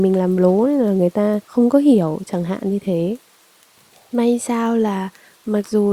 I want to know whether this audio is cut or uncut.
cut